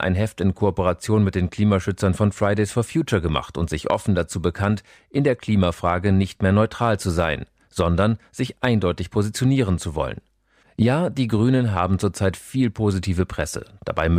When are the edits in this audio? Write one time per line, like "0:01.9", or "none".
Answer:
0:10.6